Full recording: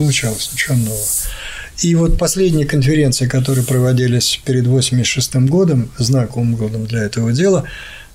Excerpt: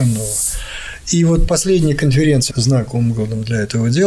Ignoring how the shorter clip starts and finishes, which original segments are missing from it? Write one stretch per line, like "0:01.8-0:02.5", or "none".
0:03.2-0:05.9